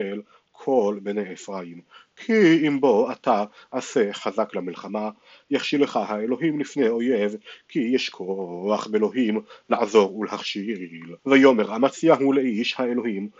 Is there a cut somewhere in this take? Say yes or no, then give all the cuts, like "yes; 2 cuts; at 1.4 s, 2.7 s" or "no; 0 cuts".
yes; 1 cut; at 11.2 s